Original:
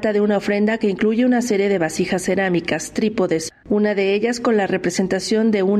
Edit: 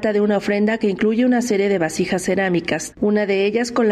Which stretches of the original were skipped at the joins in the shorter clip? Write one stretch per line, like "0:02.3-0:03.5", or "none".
0:02.9-0:03.6